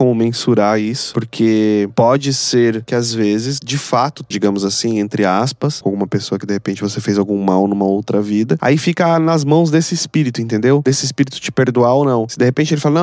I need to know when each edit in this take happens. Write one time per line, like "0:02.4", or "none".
0:04.3
0:05.8
0:08.6